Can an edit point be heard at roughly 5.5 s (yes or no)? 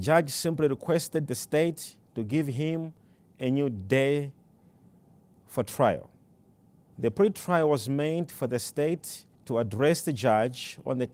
no